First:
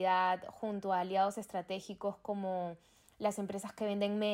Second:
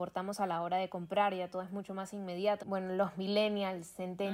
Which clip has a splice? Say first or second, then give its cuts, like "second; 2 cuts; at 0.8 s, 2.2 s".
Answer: second; 1 cut; at 2.6 s